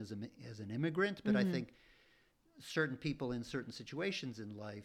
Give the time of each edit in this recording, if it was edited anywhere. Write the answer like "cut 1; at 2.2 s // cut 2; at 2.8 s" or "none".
none